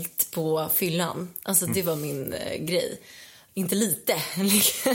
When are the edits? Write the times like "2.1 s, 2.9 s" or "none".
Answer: 3.5 s